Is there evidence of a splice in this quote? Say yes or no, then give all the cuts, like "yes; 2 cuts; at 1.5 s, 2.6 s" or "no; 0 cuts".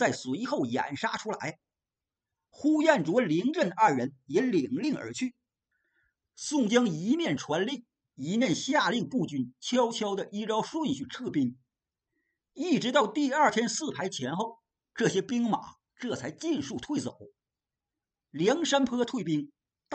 no; 0 cuts